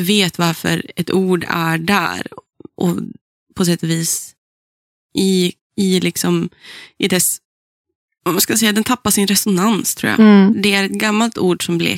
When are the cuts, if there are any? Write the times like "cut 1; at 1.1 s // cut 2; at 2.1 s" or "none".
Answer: cut 1; at 5.0 s // cut 2; at 10.5 s